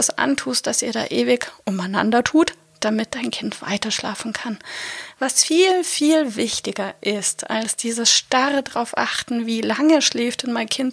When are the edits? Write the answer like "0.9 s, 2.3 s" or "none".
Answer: none